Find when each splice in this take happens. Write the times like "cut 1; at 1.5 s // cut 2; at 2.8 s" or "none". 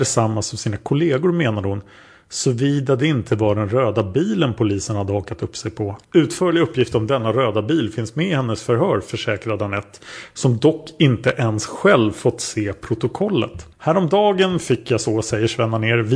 cut 1; at 6.0 s // cut 2; at 13.7 s